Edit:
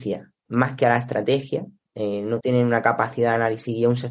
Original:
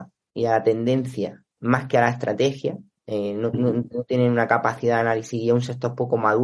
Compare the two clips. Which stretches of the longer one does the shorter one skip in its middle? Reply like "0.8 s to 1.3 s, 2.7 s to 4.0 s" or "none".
3.5 s to 4.1 s